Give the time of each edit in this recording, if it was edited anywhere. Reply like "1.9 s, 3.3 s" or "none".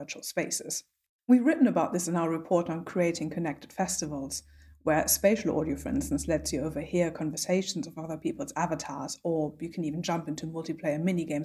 none

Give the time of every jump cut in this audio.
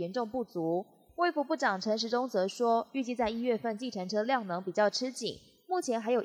none

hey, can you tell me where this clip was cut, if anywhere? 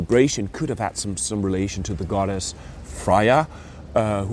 2.8 s

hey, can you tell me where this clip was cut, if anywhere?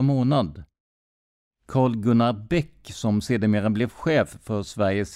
none

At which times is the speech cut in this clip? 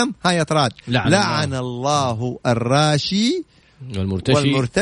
none

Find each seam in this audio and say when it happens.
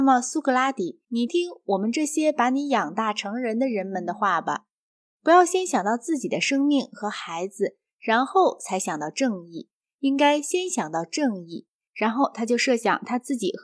1.3 s, 11.9 s

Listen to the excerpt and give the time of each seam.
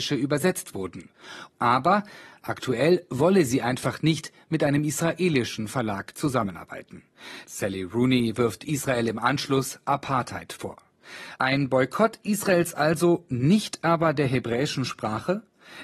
1.5 s

